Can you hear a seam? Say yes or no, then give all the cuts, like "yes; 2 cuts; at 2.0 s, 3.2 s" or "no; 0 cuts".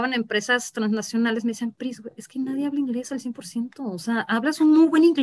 no; 0 cuts